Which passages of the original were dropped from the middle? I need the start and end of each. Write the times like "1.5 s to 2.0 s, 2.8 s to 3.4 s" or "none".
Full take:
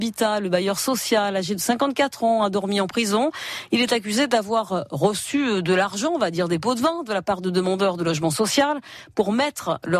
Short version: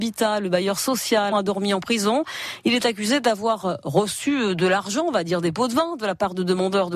1.3 s to 2.4 s